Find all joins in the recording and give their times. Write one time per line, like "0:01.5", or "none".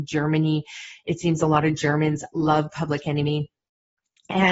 none